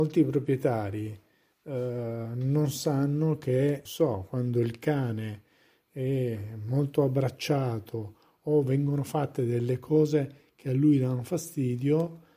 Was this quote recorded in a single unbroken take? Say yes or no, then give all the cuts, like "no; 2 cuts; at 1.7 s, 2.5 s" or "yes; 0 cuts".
no; 1 cut; at 3.9 s